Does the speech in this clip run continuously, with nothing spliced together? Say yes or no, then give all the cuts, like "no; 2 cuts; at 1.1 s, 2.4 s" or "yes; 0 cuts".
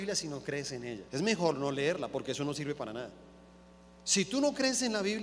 no; 1 cut; at 1.1 s